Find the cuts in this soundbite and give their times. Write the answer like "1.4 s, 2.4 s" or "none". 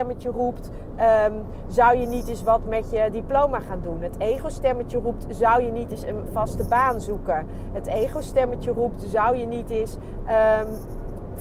none